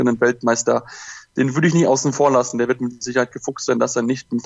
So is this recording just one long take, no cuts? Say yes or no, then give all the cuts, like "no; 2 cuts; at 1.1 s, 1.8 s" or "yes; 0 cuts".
yes; 0 cuts